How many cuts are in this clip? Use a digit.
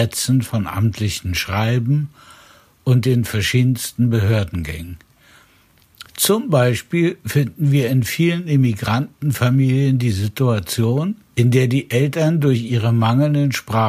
2